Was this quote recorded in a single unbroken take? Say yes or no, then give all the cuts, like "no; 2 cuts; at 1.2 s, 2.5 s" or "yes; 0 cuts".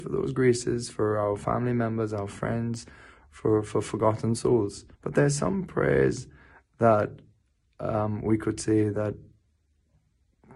no; 1 cut; at 4.9 s